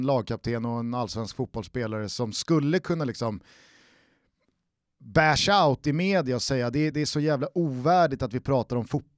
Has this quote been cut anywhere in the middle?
yes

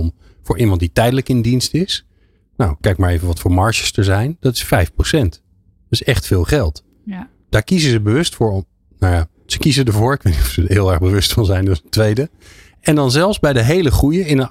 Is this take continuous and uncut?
yes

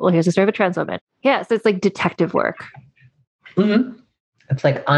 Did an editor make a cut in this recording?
yes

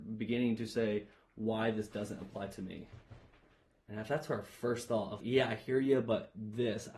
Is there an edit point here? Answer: yes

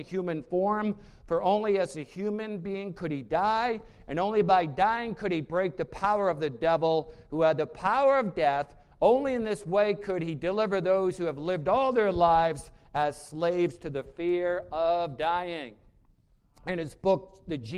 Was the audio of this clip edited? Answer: no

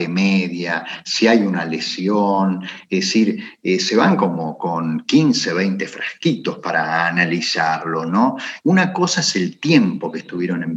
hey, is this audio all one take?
no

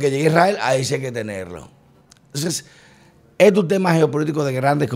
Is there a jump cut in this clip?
no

